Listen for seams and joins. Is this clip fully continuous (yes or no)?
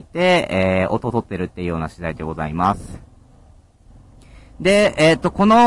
yes